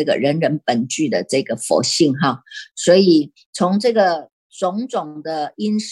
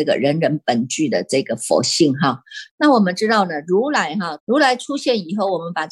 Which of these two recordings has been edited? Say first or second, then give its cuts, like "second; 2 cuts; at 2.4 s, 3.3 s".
second; 2 cuts; at 2.7 s, 4.4 s